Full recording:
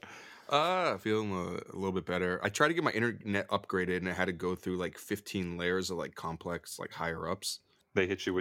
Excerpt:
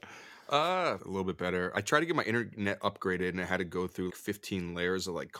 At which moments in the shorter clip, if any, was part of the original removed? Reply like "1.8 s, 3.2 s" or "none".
1.0 s, 4.1 s